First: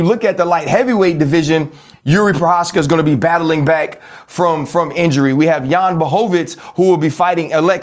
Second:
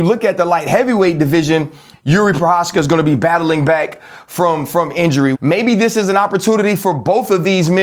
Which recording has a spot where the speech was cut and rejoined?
second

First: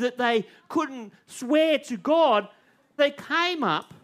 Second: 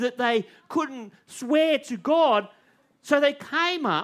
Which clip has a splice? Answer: first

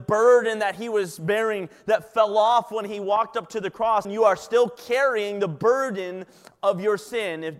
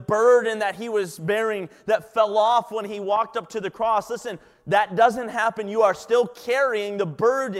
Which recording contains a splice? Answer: first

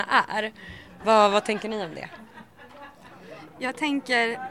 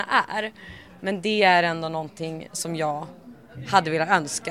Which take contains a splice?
first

